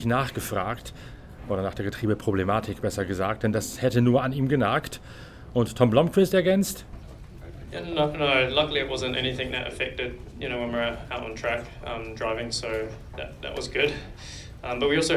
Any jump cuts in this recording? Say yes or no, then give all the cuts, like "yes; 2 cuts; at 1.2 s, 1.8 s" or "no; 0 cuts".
no; 0 cuts